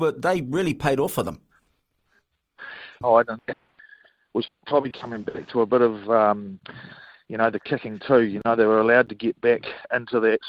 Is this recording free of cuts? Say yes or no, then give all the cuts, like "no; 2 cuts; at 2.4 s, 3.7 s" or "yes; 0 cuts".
no; 2 cuts; at 3.0 s, 4.5 s